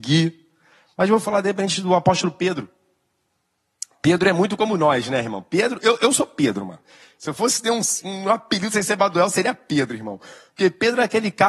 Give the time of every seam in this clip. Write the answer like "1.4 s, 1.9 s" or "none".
none